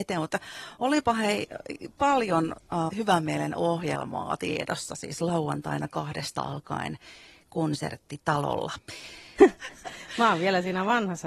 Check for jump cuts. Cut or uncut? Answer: cut